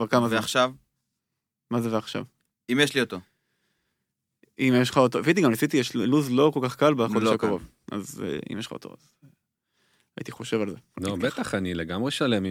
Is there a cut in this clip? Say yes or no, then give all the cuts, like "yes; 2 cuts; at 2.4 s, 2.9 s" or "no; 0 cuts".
no; 0 cuts